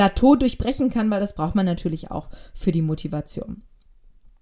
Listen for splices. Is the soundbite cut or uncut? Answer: uncut